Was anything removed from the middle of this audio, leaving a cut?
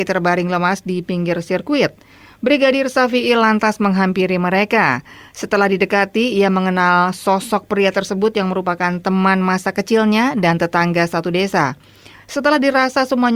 yes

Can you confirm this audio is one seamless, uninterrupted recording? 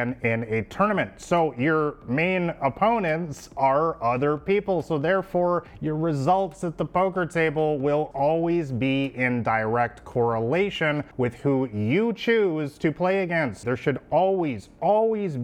no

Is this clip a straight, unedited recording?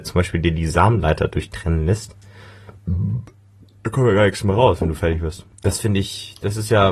no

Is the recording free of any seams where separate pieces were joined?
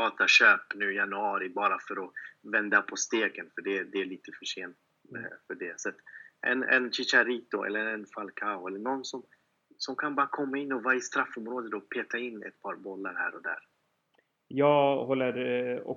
yes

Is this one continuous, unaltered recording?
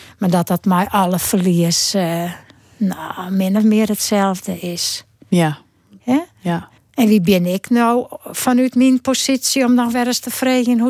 no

